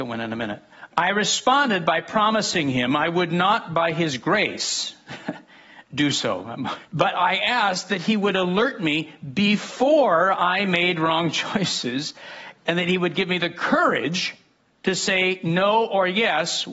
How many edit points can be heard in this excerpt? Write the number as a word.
one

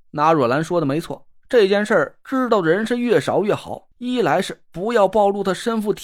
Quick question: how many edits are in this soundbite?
one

